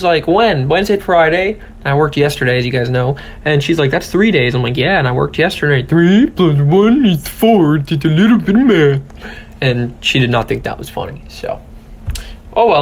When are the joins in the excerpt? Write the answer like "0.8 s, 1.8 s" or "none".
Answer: 1.0 s